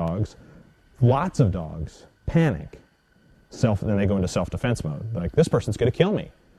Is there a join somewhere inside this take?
yes; 1 cut; at 3.3 s

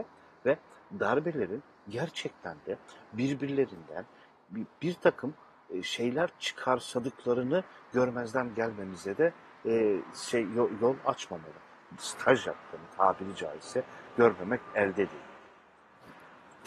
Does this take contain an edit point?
yes; 1 cut; at 12.0 s

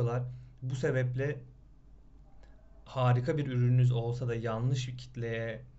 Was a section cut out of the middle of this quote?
no; 0 cuts

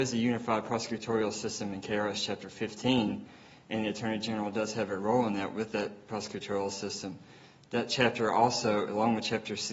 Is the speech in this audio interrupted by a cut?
no; 0 cuts

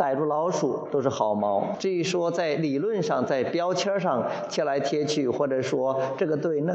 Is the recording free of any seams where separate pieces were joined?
no; 1 cut; at 1.7 s

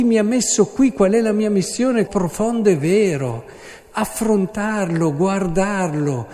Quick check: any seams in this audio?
yes; 1 cut; at 2.1 s

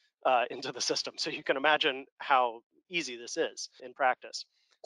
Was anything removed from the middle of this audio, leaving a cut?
yes; 1 cut; at 3.8 s

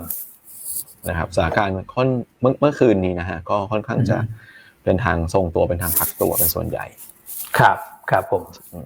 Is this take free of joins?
yes; 0 cuts

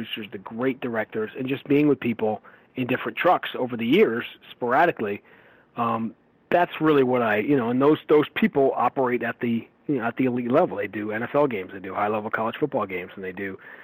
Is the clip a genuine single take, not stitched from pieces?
yes; 0 cuts

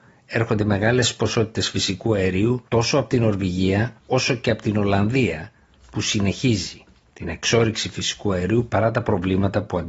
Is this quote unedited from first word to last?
no; 2 cuts; at 2.7 s, 4.0 s

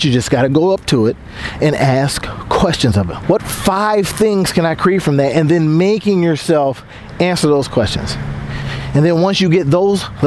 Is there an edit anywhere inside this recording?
yes; 1 cut; at 3.2 s

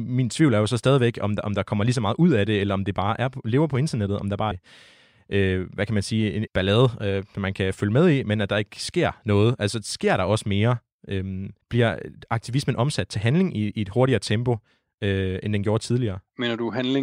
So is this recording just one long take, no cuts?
no; 3 cuts; at 4.5 s, 6.5 s, 11.6 s

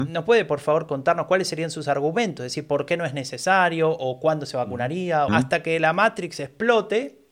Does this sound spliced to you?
yes; 1 cut; at 5.3 s

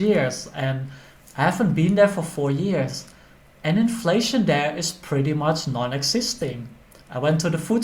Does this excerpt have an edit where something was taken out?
no; 0 cuts

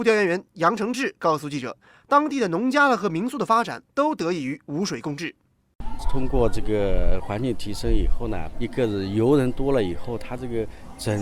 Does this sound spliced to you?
yes; 2 cuts; at 6.0 s, 8.5 s

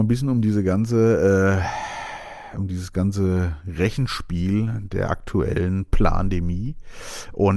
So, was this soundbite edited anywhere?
no; 0 cuts

